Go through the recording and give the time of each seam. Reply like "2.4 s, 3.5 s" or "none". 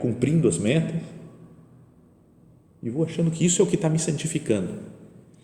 none